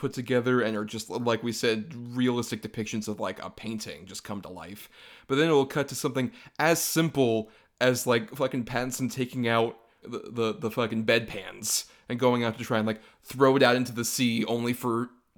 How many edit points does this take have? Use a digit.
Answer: 0